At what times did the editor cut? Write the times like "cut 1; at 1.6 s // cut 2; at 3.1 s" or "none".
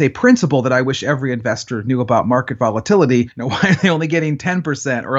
cut 1; at 3.3 s